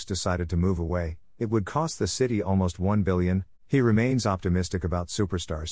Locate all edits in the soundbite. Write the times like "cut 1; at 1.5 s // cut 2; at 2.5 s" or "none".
cut 1; at 3.5 s